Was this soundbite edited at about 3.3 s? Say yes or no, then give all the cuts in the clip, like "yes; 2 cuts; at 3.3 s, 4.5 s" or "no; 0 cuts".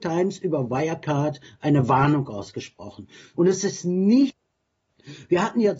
yes; 1 cut; at 3.3 s